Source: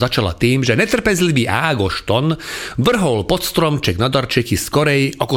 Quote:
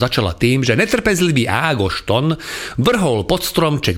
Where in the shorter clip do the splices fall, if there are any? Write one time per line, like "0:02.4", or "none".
none